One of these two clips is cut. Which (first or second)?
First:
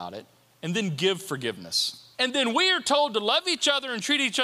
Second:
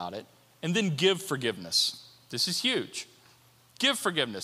first